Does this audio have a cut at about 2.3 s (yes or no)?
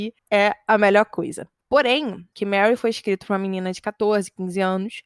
yes